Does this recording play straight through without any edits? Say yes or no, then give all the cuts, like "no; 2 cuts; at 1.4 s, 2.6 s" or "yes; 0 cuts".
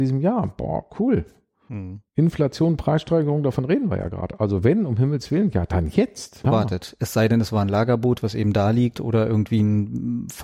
no; 1 cut; at 6.4 s